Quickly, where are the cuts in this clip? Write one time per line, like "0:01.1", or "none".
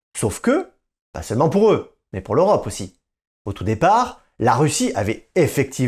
none